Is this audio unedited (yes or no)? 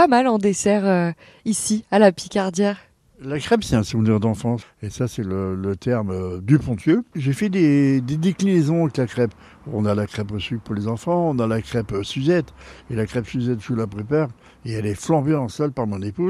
no